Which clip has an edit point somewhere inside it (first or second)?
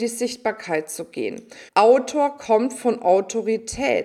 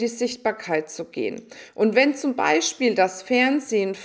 first